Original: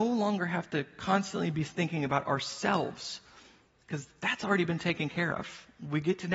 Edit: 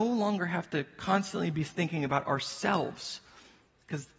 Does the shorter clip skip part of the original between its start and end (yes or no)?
no